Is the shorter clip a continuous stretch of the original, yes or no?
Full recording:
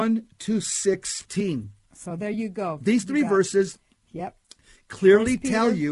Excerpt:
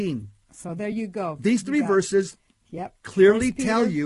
no